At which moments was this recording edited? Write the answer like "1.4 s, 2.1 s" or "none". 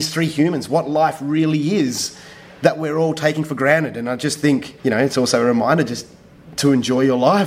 4.8 s